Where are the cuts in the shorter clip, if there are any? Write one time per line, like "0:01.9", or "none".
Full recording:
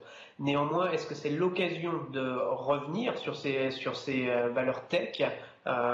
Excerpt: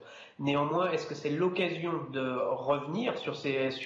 none